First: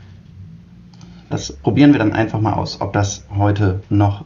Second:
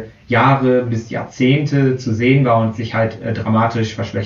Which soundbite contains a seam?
first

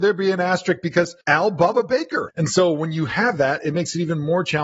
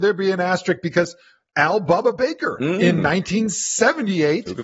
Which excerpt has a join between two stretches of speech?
first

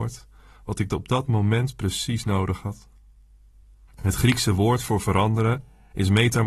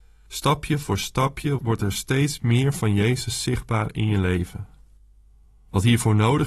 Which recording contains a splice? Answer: first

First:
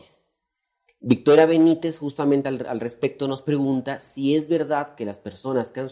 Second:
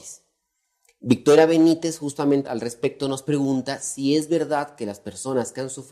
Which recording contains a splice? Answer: second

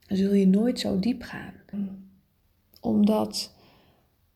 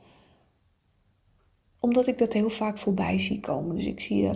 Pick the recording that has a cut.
first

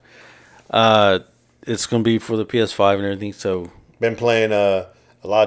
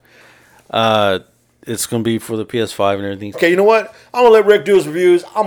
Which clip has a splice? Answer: second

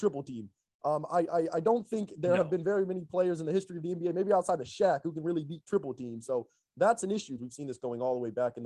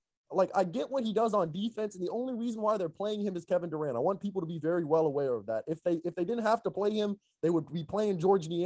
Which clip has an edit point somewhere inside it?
first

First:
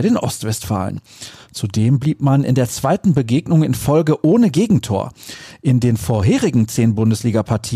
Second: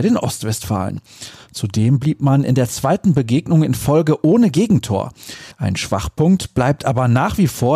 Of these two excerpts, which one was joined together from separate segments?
second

